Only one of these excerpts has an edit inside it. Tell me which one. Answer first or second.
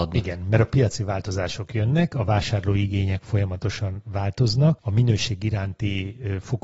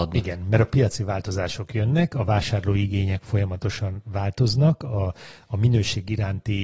first